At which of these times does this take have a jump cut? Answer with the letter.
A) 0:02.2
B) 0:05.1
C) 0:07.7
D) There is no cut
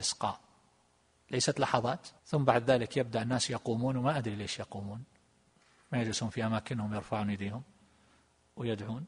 A